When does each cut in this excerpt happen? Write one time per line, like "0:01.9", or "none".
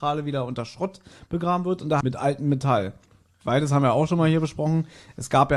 0:02.0

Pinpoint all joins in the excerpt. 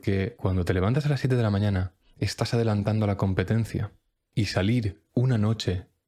none

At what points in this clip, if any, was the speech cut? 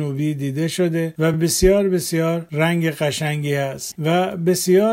none

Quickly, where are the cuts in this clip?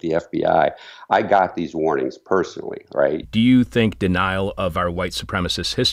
0:03.2

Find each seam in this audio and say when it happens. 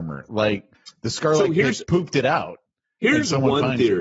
none

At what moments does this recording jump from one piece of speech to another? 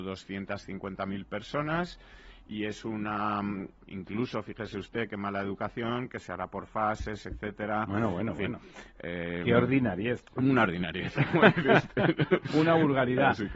0:03.8
0:06.1

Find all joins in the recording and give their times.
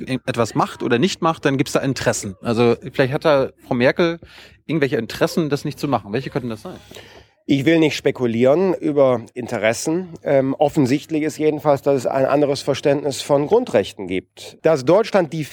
0:08.8
0:14.6

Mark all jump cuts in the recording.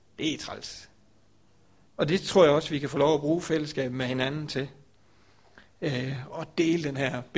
0:01.9

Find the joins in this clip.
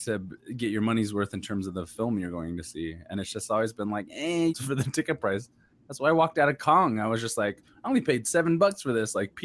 0:04.5

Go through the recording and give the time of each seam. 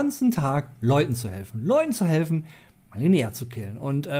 none

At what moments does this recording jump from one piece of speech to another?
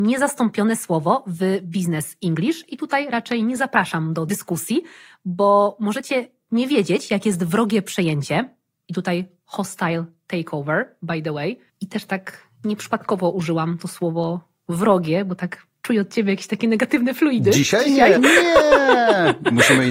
0:11.7
0:18.2

